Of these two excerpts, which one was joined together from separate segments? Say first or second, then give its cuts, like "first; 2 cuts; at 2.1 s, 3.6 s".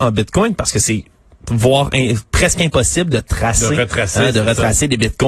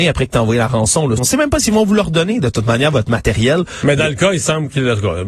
second; 1 cut; at 1.2 s